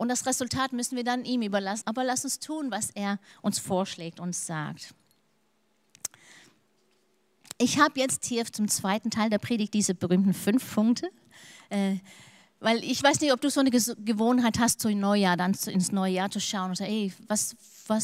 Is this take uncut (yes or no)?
no